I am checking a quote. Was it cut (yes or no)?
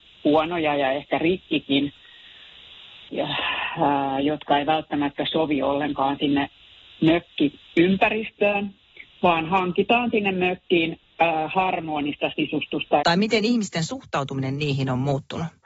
yes